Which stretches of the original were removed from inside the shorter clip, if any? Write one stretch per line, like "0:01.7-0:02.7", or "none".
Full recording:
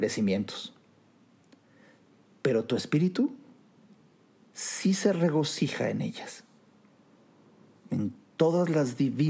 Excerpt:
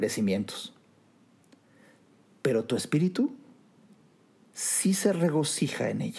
none